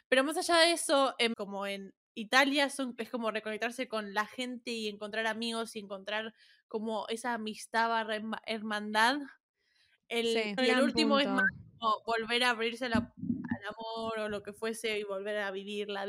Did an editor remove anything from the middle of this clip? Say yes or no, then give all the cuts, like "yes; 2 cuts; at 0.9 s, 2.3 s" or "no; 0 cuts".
yes; 2 cuts; at 1.3 s, 10.6 s